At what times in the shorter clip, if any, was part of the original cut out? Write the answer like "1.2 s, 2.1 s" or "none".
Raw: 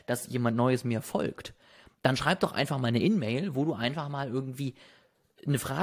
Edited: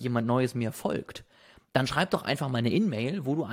none